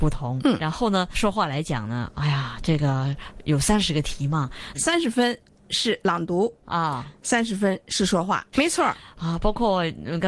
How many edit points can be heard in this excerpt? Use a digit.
2